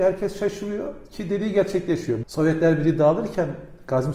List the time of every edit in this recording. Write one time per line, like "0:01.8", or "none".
0:02.2